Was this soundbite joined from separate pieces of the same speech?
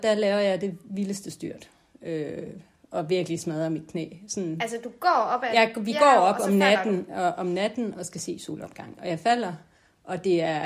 no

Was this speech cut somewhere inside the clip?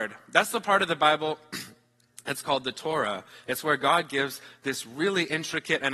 no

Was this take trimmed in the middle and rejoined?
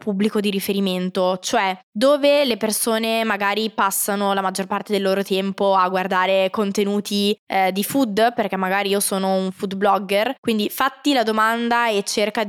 no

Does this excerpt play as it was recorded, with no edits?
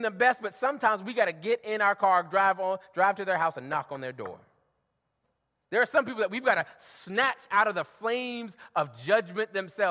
yes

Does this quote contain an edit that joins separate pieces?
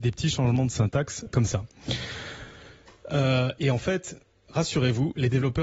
yes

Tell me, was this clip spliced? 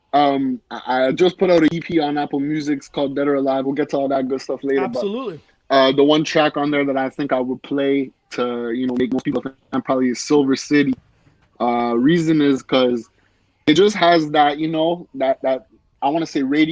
no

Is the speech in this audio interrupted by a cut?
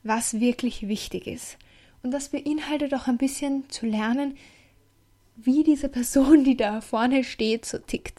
no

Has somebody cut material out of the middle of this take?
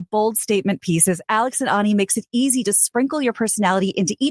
no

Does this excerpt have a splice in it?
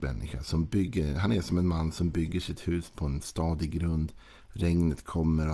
no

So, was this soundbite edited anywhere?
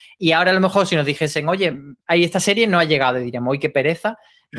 yes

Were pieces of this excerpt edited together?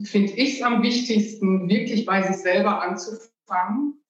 no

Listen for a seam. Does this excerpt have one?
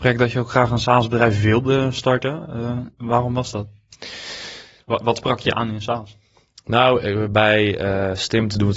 no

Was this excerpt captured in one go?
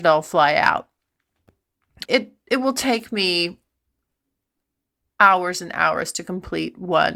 no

